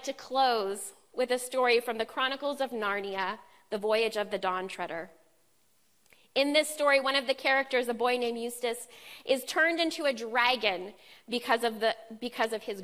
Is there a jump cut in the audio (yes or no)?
no